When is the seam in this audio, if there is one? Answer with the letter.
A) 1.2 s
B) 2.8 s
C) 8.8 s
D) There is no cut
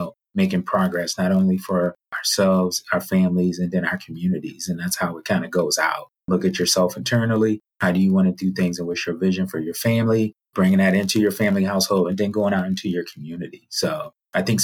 D